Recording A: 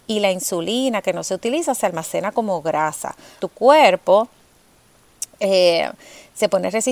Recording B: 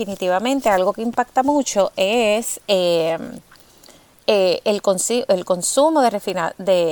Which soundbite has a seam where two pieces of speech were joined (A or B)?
A